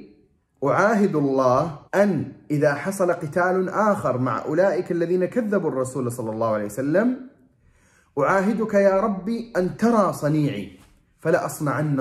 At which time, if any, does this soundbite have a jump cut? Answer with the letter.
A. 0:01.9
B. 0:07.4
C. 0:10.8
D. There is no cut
A